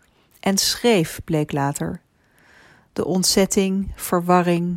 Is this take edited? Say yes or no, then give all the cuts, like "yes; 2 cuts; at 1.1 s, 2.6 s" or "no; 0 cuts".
no; 0 cuts